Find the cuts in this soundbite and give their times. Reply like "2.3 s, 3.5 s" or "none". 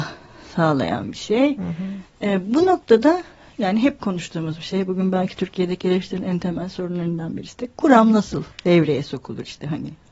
8.5 s